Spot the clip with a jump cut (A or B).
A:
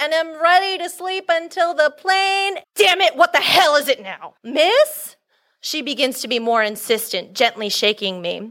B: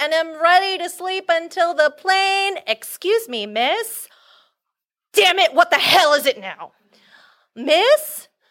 A